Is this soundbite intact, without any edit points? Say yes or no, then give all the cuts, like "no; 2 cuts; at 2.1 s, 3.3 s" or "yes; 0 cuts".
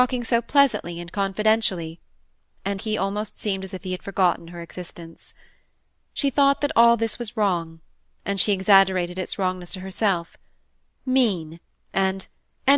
no; 1 cut; at 2.8 s